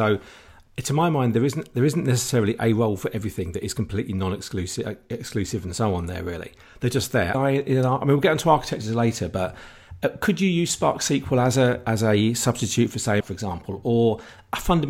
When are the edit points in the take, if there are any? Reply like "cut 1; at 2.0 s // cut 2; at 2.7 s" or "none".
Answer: cut 1; at 7.3 s // cut 2; at 13.2 s